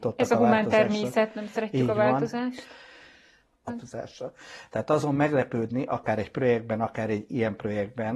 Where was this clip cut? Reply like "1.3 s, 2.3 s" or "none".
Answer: 3.7 s